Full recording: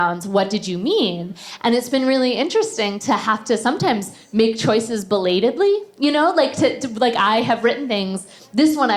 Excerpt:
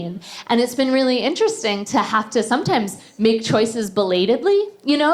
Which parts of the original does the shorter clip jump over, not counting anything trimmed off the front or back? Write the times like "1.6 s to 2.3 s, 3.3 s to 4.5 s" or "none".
none